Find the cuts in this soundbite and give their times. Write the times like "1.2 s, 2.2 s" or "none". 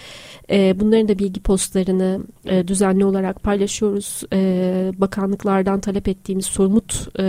none